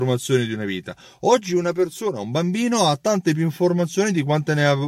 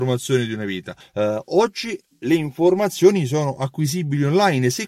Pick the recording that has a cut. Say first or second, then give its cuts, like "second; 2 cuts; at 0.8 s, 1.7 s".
second; 1 cut; at 1.0 s